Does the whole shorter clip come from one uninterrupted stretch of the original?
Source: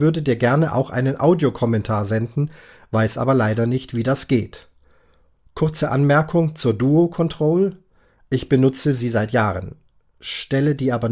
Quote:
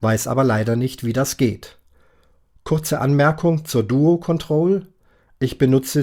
yes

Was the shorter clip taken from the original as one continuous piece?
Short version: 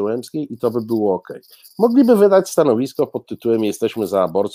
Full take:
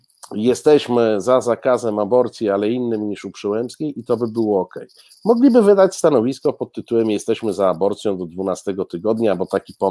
yes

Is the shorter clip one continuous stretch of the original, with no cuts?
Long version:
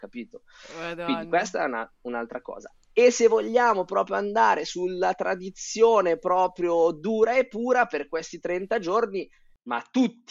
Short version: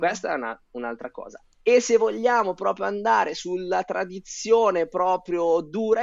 yes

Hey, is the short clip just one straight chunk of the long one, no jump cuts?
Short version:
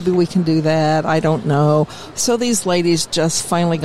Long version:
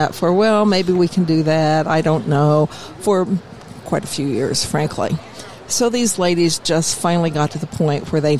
no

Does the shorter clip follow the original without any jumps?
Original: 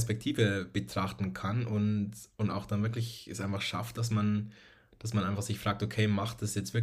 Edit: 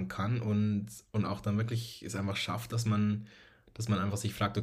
yes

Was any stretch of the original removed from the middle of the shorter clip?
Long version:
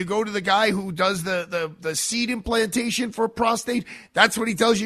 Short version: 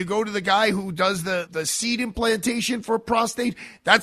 yes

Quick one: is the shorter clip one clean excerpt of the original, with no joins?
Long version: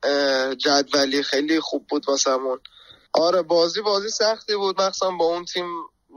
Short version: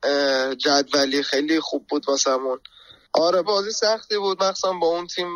no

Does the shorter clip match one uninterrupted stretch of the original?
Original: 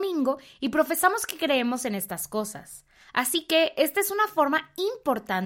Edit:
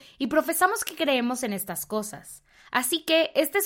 yes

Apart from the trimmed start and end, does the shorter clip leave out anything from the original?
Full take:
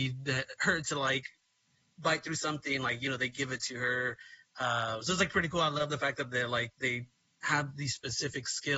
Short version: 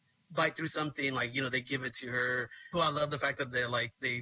yes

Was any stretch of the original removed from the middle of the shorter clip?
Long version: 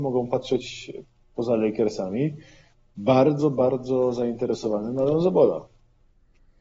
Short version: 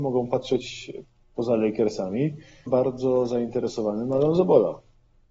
yes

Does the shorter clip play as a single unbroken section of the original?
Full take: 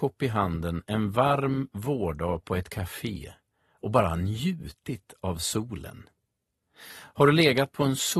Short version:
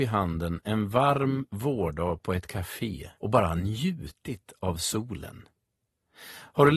no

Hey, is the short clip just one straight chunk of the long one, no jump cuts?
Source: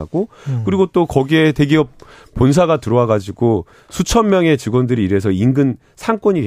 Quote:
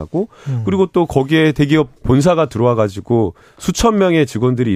no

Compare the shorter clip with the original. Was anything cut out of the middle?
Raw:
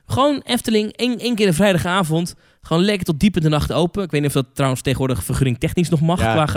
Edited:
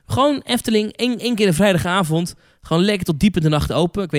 no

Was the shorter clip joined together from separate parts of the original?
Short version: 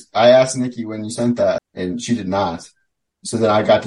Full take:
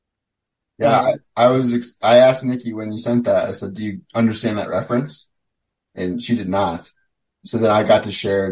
yes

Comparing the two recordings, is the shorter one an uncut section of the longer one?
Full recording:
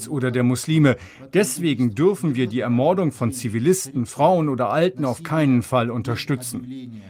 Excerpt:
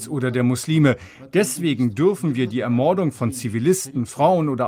yes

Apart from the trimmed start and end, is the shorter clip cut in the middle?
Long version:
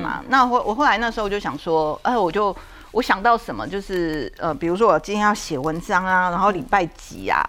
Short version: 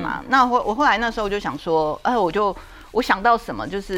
no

